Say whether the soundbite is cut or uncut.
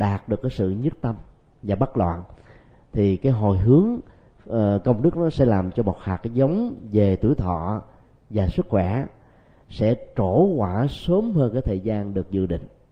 uncut